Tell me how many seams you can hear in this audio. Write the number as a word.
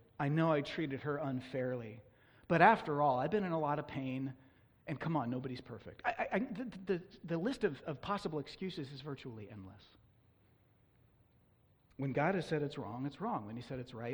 zero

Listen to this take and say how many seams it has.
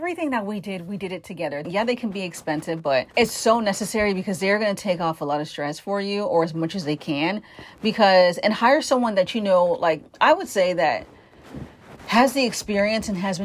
two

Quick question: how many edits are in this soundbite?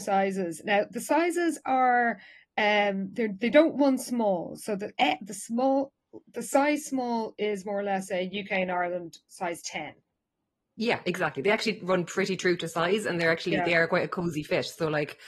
zero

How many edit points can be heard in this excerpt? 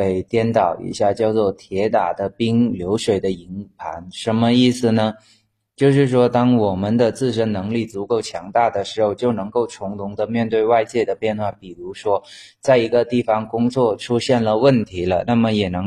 zero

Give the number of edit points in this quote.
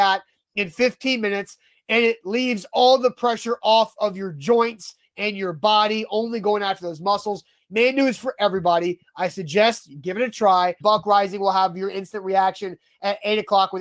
one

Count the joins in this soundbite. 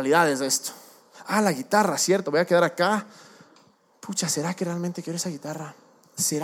one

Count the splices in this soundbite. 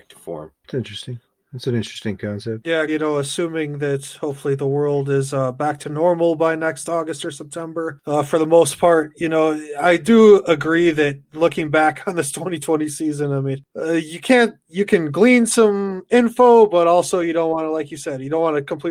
one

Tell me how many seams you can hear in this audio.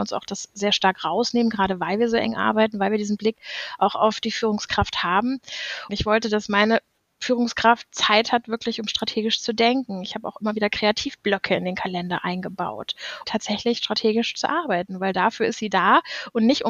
two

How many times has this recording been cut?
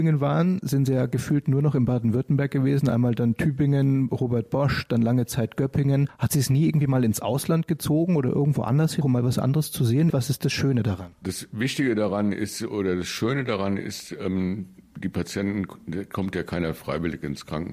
two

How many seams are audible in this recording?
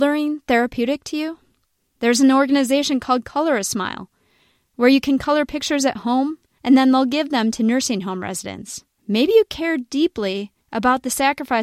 two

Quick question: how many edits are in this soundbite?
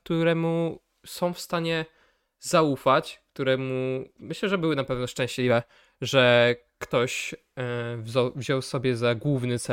one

